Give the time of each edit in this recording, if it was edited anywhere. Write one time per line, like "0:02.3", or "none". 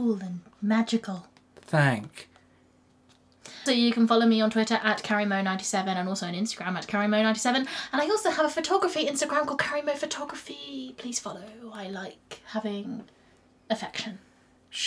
0:03.7